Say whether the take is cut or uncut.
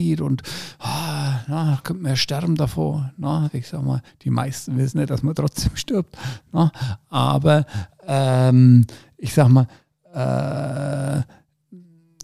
uncut